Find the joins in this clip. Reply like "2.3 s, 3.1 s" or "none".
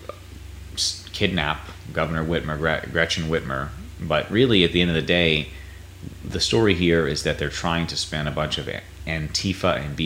none